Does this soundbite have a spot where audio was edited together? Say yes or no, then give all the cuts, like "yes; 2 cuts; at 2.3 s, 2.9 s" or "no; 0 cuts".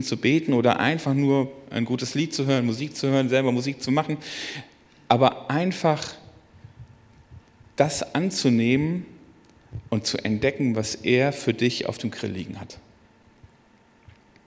no; 0 cuts